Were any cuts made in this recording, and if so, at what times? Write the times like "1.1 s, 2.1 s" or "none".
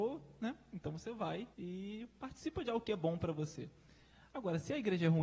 1.5 s